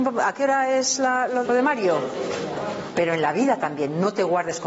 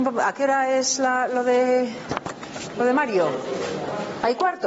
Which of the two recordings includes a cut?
first; 2 cuts; at 1.4 s, 2.9 s

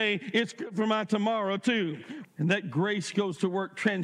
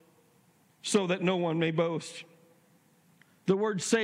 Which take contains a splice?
first; 1 cut; at 2.2 s

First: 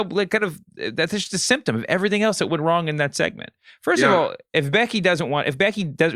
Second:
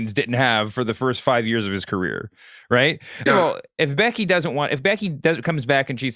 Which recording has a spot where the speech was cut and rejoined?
second; 1 cut; at 3.3 s

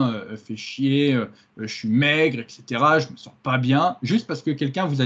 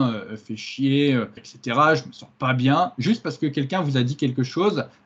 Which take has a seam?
second; 1 cut; at 1.4 s

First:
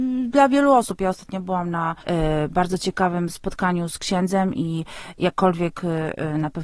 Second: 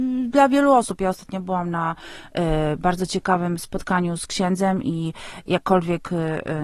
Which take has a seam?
first; 1 cut; at 2.0 s

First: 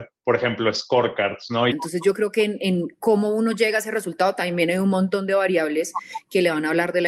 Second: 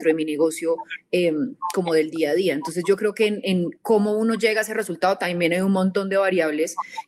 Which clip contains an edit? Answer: first; 1 cut; at 1.7 s

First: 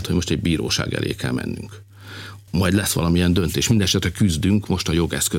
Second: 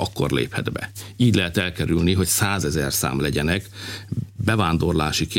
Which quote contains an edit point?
first; 1 cut; at 2.5 s

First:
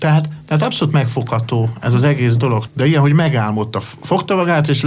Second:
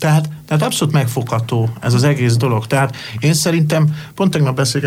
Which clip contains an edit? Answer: first; 1 cut; at 2.7 s

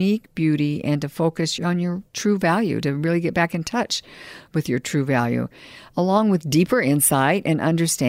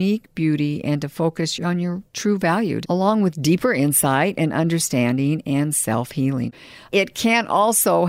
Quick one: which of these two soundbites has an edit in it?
second; 1 cut; at 2.8 s

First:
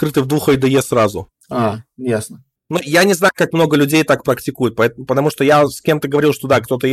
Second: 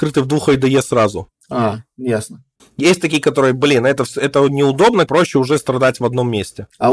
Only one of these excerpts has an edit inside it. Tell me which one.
second; 2 cuts; at 2.6 s, 5.1 s

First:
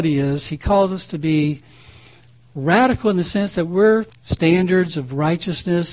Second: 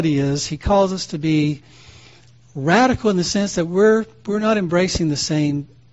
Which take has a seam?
first; 1 cut; at 4.1 s

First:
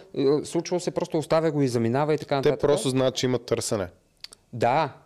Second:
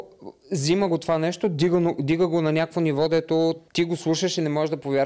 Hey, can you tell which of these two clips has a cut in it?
second; 1 cut; at 3.7 s

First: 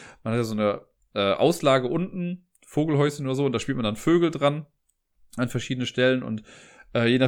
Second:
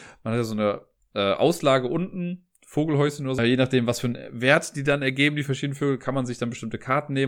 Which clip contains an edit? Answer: second; 1 cut; at 3.4 s

